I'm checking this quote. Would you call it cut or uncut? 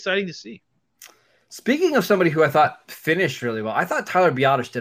uncut